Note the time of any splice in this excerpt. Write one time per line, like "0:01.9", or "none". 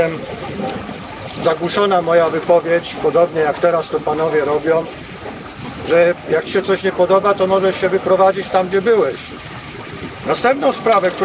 0:10.2